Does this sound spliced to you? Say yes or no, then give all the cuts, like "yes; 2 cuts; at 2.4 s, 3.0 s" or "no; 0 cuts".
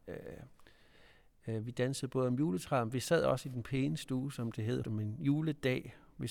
yes; 1 cut; at 4.8 s